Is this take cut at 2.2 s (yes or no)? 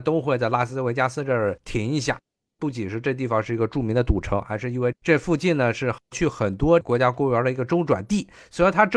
no